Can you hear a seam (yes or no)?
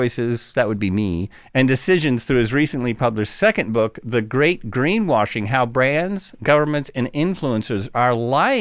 no